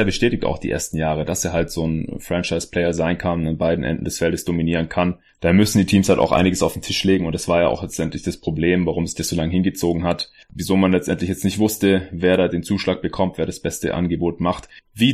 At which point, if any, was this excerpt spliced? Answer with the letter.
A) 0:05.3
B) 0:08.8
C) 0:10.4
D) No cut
A